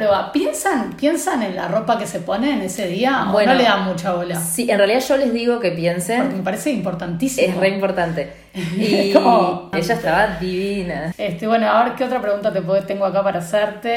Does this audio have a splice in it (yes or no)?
yes